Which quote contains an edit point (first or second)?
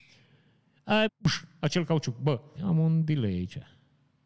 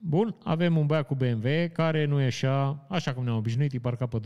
first